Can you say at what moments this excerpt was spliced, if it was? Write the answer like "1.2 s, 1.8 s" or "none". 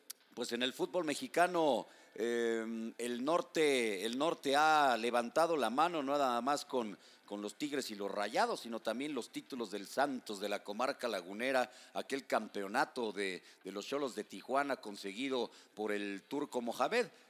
none